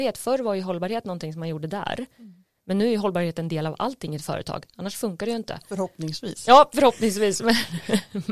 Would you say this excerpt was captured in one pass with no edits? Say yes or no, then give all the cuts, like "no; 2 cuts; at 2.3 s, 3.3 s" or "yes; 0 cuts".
yes; 0 cuts